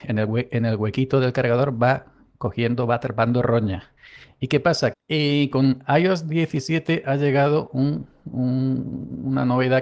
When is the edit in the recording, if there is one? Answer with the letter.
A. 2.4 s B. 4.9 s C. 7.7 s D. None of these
B